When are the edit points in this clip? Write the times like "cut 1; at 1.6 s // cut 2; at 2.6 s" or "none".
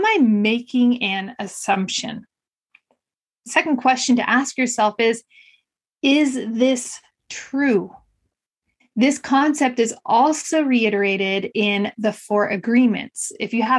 cut 1; at 8.8 s